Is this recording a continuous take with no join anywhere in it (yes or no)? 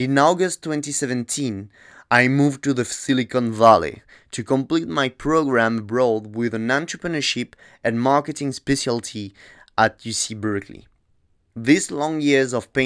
yes